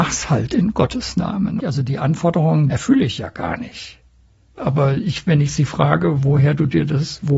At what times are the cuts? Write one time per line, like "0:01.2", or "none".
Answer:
0:01.6
0:02.7
0:04.6